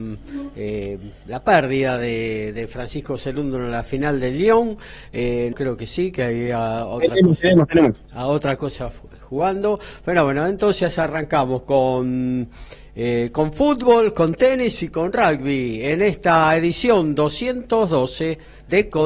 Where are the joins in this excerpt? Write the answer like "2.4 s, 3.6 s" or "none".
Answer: 5.5 s

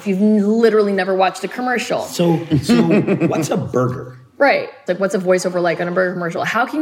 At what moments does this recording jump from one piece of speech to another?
4.9 s

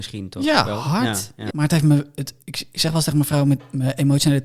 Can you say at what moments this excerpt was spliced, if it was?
1.5 s

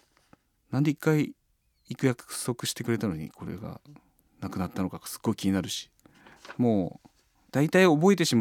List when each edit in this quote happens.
none

